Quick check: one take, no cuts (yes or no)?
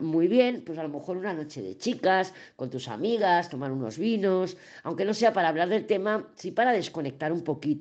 yes